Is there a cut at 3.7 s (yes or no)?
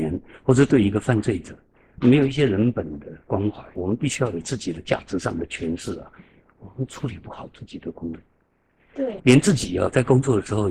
yes